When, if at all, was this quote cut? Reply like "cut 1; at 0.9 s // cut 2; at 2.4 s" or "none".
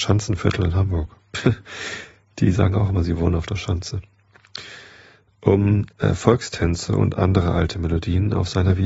none